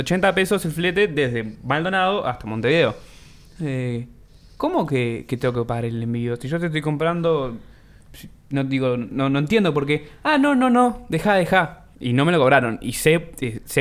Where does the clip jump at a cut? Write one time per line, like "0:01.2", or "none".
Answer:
0:11.9